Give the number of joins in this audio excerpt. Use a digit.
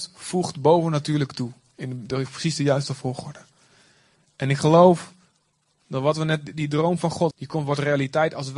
1